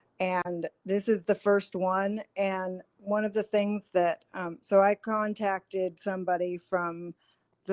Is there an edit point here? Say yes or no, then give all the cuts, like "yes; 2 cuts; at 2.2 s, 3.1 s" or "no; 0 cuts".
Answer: no; 0 cuts